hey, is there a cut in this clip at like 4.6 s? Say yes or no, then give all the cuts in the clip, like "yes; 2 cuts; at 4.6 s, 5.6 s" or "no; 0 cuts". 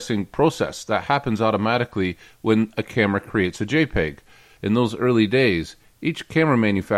yes; 1 cut; at 4.6 s